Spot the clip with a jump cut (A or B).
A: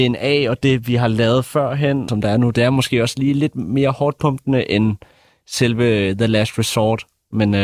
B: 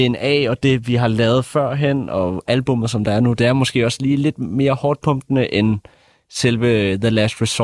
A